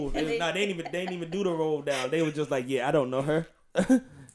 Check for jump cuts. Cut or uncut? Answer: uncut